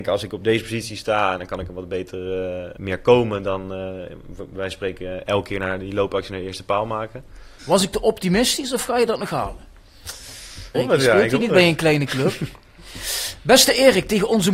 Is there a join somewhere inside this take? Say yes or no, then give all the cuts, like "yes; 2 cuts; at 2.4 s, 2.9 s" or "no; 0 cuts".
yes; 3 cuts; at 2.8 s, 7.6 s, 10.7 s